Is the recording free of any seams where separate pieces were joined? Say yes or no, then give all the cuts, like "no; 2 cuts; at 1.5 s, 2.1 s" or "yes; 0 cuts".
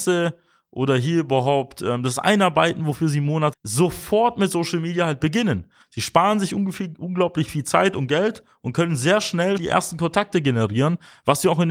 no; 2 cuts; at 3.5 s, 9.6 s